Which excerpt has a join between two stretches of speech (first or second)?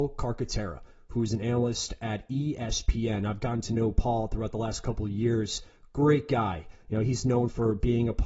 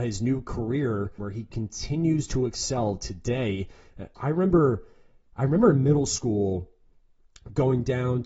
second